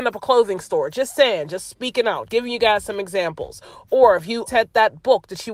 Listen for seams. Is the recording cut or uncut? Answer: cut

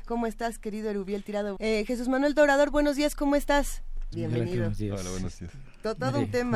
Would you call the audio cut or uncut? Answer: cut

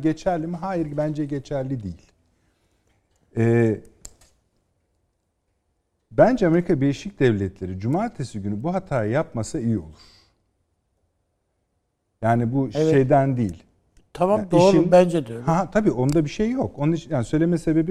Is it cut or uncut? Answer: uncut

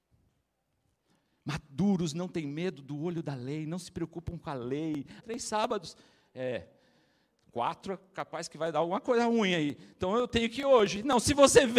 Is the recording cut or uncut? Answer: cut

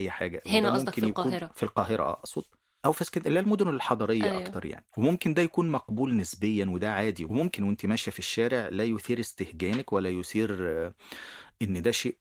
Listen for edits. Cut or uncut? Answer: cut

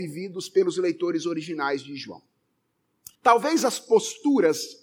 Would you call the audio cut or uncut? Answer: cut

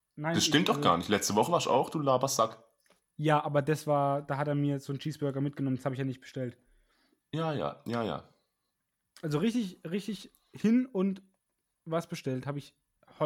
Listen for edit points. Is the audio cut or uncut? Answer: uncut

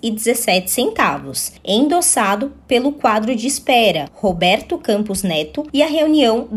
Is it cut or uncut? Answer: cut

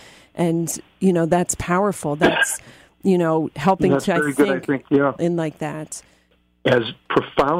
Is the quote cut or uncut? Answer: cut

